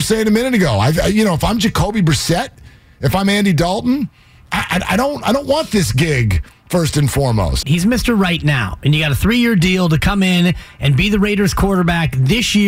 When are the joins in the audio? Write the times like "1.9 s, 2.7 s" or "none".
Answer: 7.6 s

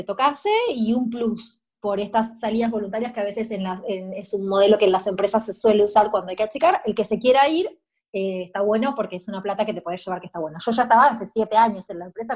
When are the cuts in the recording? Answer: none

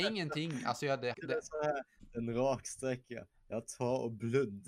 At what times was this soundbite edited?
1.1 s

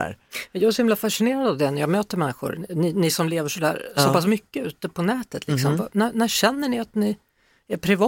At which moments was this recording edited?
none

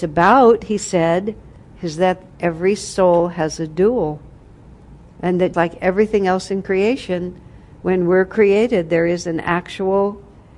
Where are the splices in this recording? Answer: 5.5 s

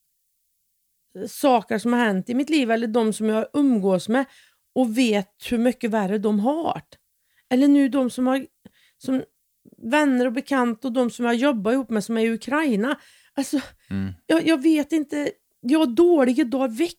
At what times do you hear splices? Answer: none

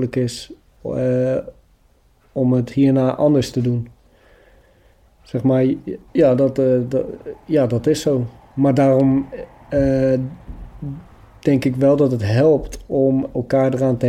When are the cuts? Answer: 6.1 s

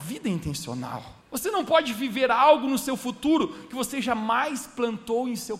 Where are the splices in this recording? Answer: 1.2 s

